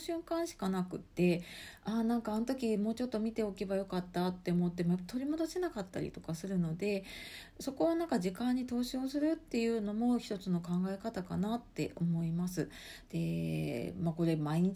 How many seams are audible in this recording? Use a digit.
1